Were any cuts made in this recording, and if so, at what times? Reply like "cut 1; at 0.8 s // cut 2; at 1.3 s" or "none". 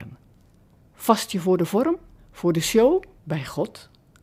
cut 1; at 3.2 s